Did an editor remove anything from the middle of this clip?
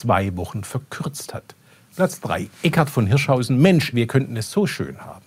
yes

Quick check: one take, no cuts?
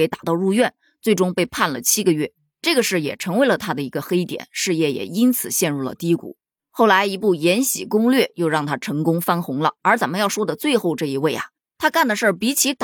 no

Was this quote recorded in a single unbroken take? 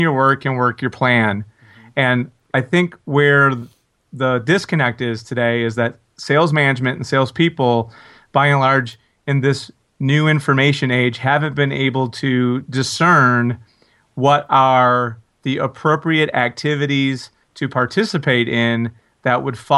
yes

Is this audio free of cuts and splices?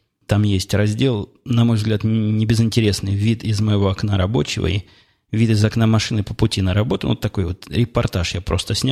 yes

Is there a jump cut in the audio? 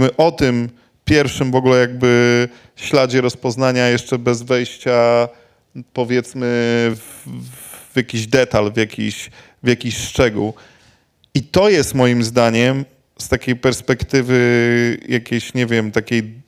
no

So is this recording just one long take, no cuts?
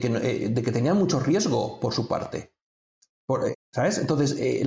no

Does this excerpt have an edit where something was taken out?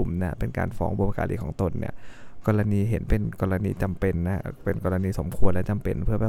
no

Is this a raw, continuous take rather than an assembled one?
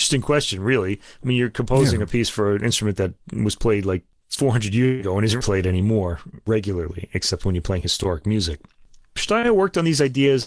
no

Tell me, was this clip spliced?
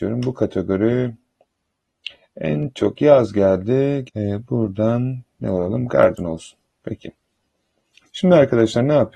yes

